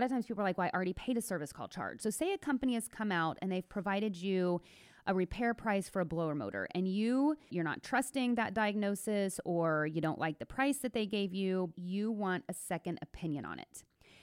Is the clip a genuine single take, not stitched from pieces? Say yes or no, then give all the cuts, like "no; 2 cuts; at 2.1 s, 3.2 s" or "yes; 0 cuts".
no; 3 cuts; at 2.0 s, 7.5 s, 11.7 s